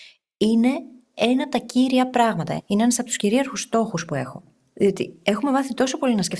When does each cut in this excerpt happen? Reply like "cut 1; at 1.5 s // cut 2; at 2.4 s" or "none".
none